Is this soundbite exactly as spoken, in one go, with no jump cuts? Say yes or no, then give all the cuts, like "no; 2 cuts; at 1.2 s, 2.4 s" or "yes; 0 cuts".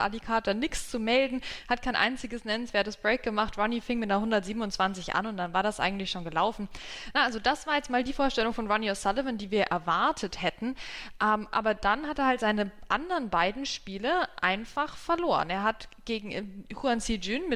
yes; 0 cuts